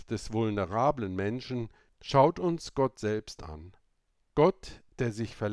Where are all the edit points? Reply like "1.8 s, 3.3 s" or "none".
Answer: none